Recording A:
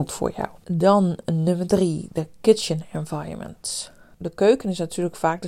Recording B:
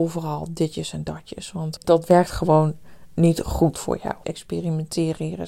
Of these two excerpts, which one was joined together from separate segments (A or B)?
B